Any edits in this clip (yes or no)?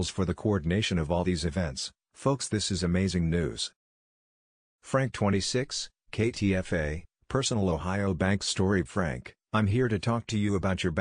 no